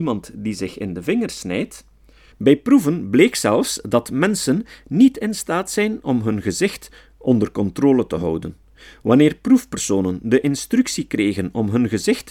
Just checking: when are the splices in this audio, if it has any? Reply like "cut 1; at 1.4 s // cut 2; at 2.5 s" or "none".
cut 1; at 2.3 s